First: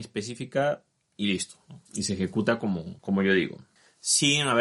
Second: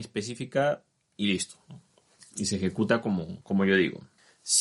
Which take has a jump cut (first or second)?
first